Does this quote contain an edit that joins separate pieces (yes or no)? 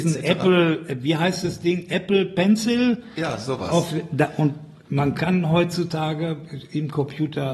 no